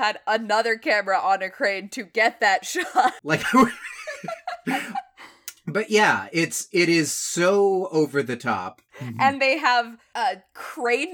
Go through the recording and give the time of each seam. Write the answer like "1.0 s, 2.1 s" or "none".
3.2 s, 8.9 s